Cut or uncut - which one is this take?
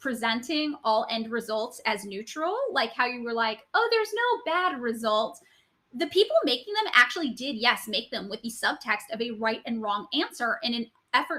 uncut